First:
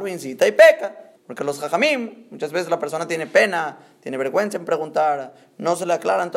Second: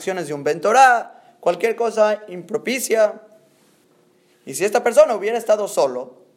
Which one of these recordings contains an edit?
first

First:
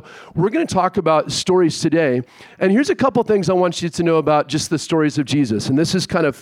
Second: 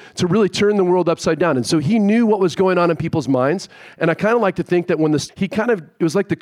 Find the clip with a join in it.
second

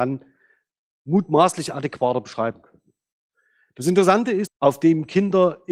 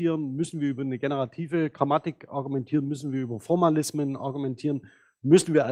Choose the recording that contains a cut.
first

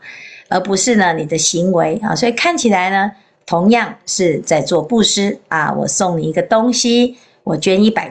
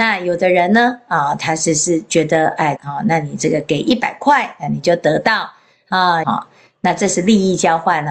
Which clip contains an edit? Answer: second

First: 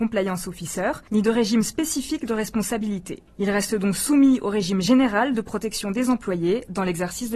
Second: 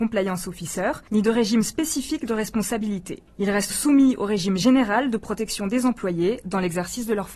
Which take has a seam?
second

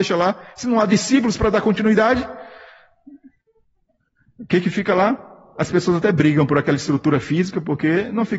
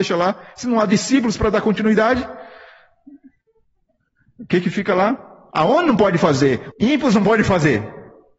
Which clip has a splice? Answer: second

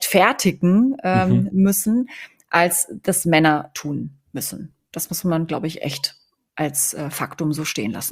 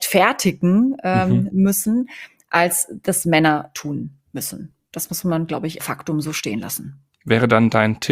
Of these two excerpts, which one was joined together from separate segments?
second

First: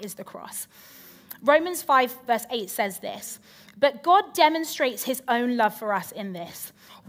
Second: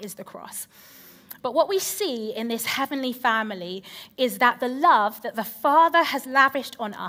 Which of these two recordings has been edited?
second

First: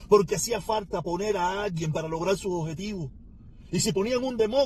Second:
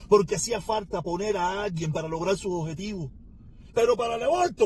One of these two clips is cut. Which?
second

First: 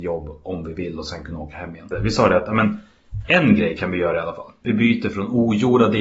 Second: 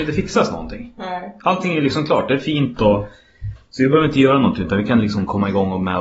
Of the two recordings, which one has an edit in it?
first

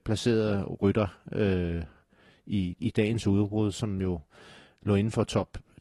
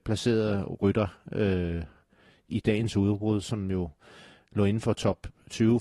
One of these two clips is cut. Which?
second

